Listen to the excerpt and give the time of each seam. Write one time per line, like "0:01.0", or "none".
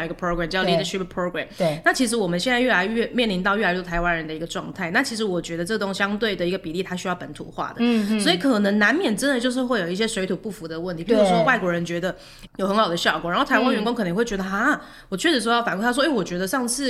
0:12.5